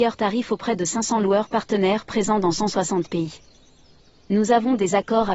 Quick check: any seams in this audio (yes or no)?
no